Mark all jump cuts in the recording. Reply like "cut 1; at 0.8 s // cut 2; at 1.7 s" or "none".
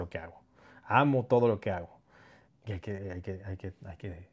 cut 1; at 2.5 s